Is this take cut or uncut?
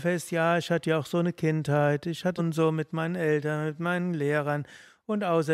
cut